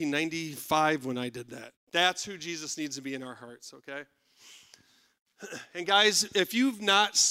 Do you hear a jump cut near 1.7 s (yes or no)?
yes